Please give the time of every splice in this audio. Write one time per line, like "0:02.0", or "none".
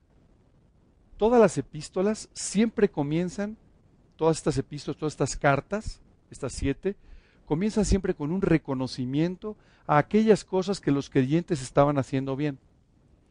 0:01.1

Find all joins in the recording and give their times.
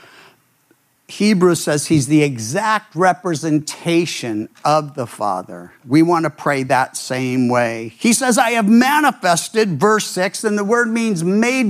0:05.8

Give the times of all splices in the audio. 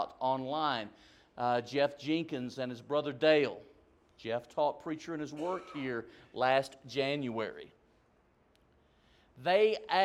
none

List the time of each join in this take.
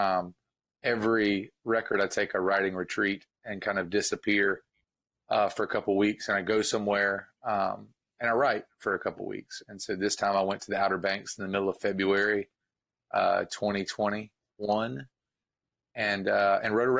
none

